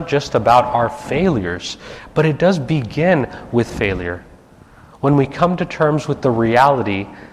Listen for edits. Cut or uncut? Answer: uncut